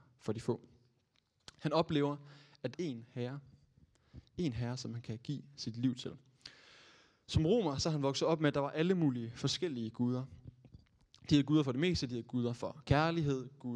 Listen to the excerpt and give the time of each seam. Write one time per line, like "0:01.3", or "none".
0:02.7